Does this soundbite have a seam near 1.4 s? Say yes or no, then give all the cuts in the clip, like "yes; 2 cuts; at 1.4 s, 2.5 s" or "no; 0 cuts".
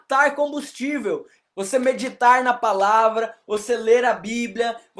yes; 1 cut; at 1.4 s